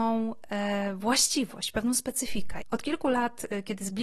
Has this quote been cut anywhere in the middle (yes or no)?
yes